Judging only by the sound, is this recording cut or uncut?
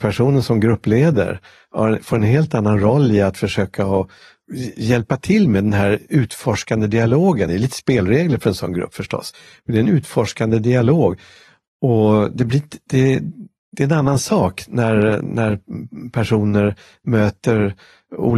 uncut